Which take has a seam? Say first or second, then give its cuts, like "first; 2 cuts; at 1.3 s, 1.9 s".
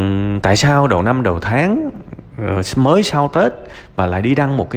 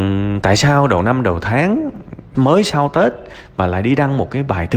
second; 1 cut; at 2.3 s